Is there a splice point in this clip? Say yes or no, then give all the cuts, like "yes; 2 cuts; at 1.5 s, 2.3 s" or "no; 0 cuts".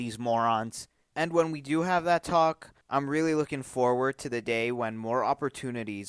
yes; 2 cuts; at 1.1 s, 2.8 s